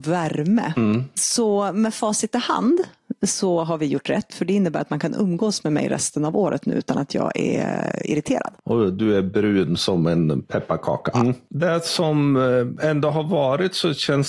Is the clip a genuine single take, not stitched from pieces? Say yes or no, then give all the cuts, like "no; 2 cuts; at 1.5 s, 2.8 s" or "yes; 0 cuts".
no; 1 cut; at 11.1 s